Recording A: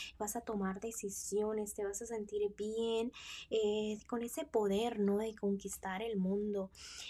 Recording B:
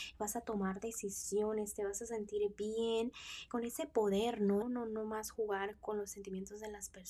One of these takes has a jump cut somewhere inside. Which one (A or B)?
B